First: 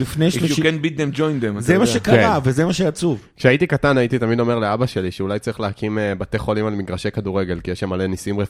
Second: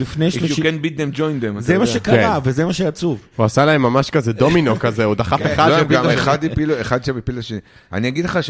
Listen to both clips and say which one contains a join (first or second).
second